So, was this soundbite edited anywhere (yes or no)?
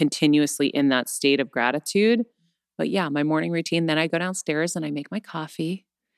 no